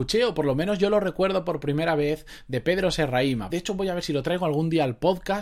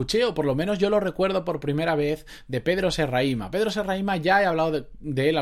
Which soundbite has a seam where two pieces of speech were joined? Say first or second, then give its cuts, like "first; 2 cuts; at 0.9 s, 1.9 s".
first; 1 cut; at 3.5 s